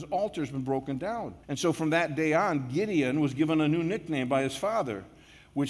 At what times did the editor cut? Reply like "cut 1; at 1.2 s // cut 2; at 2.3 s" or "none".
cut 1; at 1.4 s